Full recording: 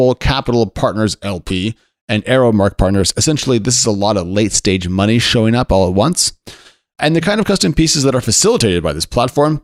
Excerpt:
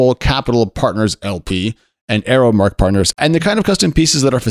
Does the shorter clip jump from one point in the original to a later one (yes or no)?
yes